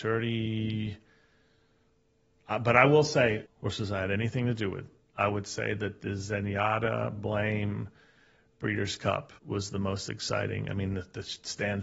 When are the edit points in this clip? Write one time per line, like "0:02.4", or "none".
0:03.5
0:09.4